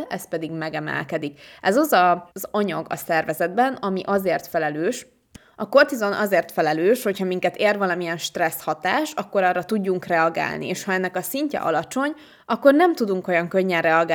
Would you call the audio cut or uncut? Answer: cut